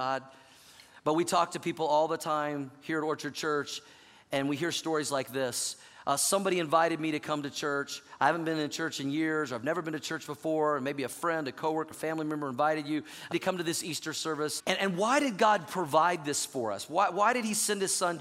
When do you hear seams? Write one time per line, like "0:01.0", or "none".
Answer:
0:11.9
0:13.3
0:14.6